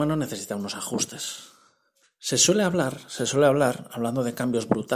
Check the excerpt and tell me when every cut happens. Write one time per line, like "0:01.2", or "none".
0:02.0